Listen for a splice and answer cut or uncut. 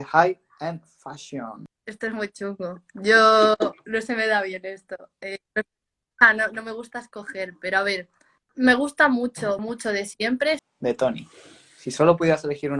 cut